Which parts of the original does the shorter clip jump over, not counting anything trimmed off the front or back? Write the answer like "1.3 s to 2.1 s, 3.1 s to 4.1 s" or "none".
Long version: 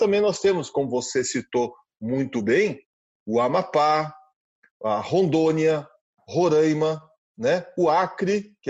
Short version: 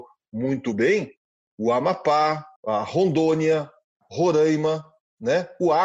4.2 s to 4.7 s